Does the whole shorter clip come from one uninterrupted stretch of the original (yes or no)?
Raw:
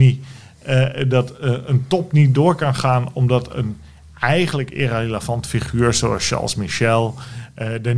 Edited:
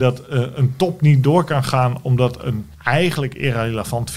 no